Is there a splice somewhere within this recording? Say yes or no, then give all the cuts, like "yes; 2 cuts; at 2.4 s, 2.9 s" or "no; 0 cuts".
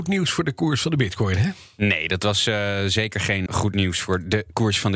yes; 1 cut; at 3.5 s